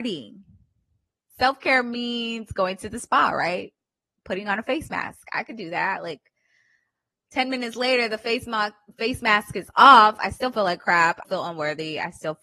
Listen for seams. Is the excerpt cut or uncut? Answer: cut